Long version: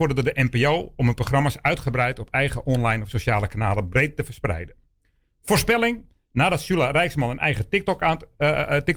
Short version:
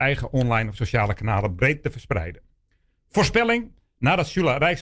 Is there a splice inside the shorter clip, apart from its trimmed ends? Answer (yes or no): no